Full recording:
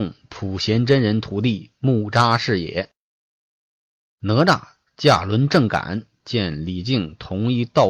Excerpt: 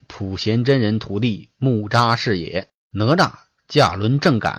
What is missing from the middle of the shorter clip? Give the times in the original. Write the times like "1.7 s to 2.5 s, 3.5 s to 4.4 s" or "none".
3.0 s to 4.1 s